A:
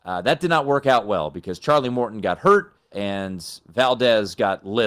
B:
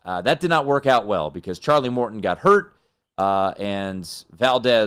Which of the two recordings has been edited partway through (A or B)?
A